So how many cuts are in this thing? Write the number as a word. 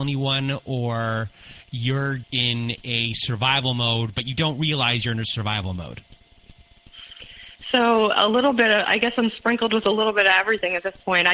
one